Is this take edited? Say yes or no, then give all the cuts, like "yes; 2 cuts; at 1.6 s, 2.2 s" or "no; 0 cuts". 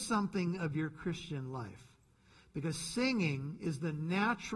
no; 0 cuts